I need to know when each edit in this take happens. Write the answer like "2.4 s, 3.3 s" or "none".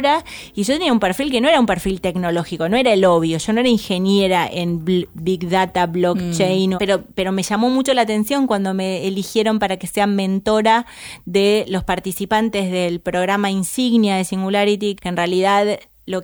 6.8 s, 15.0 s